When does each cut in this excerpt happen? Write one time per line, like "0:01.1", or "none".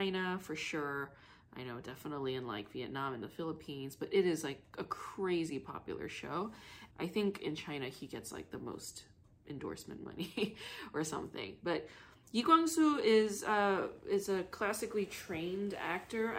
0:06.9